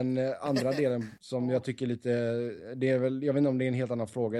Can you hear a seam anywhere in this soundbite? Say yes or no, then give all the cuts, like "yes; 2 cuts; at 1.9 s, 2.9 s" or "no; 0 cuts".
no; 0 cuts